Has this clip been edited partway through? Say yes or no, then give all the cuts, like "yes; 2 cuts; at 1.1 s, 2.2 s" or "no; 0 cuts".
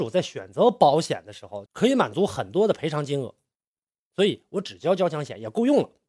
yes; 1 cut; at 1.7 s